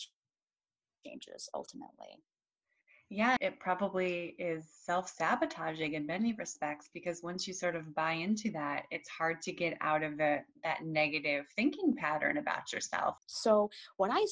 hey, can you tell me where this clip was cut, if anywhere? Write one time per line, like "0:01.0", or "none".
0:03.4
0:13.2